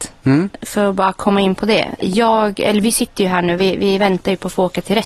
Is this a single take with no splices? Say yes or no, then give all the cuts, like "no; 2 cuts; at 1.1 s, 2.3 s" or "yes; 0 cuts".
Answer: yes; 0 cuts